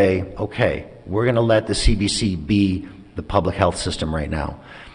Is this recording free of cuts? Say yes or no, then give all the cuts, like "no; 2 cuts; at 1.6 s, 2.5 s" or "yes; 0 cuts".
yes; 0 cuts